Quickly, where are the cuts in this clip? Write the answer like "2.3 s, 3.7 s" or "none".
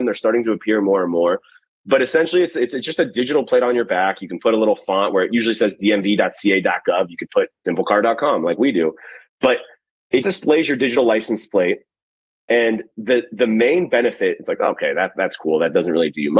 10.2 s